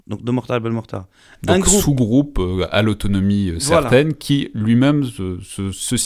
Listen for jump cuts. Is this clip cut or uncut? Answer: uncut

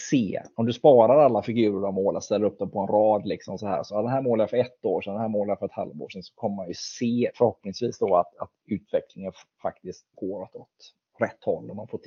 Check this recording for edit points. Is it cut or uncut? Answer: cut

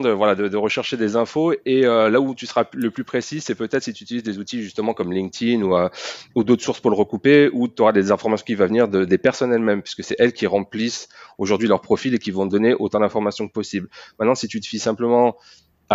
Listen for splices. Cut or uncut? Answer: uncut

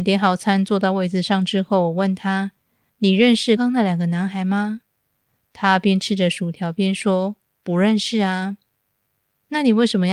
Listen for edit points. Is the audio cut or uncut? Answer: cut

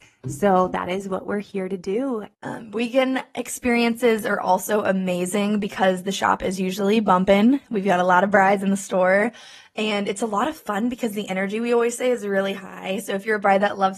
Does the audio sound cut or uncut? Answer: cut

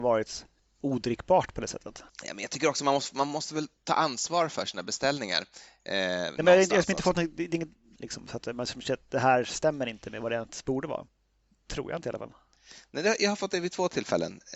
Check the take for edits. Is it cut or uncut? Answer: cut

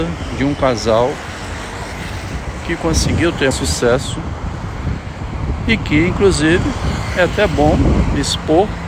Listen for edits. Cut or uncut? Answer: cut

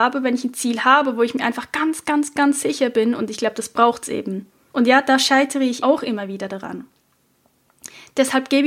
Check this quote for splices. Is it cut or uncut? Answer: cut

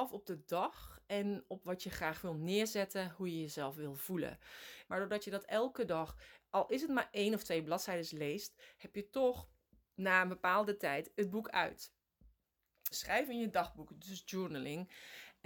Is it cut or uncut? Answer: cut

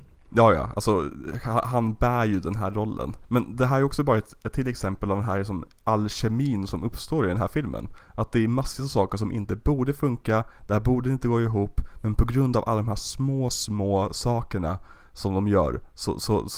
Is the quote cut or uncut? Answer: uncut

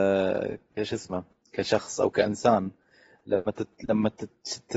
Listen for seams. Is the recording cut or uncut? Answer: uncut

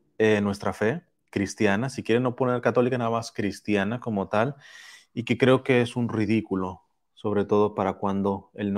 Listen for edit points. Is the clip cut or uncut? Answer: uncut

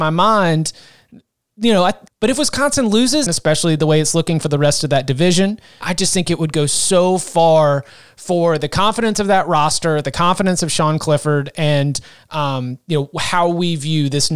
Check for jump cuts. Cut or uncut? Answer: cut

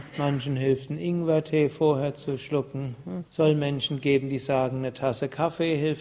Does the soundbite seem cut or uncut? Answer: cut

